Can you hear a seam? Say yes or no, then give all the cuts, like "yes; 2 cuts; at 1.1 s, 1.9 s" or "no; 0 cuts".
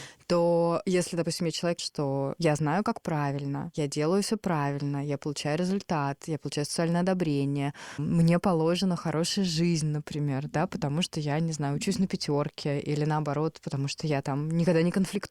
yes; 1 cut; at 1.8 s